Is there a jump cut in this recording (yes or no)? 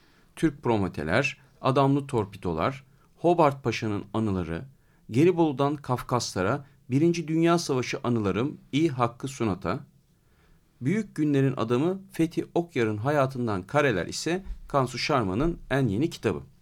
no